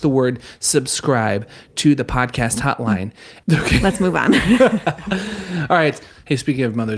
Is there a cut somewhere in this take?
yes; 1 cut; at 3.4 s

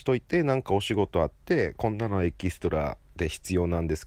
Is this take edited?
no; 0 cuts

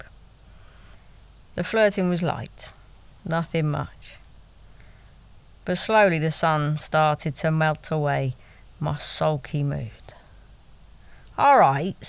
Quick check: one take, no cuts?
yes; 0 cuts

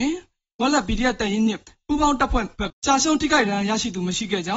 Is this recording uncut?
no; 1 cut; at 2.7 s

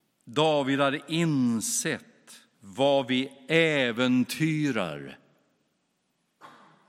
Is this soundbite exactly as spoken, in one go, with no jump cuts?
no; 1 cut; at 2.5 s

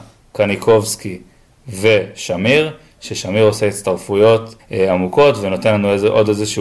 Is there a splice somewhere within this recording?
yes; 1 cut; at 4.6 s

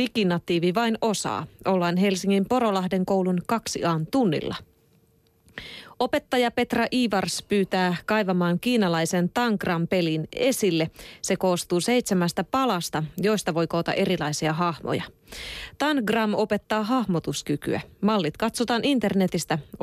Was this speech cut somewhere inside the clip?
yes; 1 cut; at 13.1 s

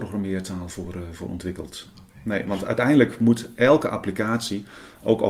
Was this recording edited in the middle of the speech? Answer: no; 0 cuts

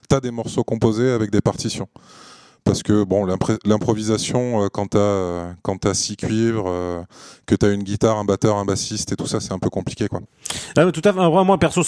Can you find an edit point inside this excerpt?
no; 0 cuts

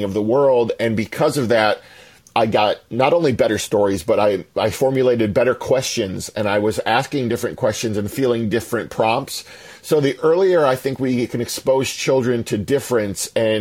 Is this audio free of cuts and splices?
yes; 0 cuts

